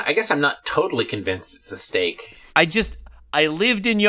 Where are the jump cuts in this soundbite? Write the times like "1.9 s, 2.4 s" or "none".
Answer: 2.5 s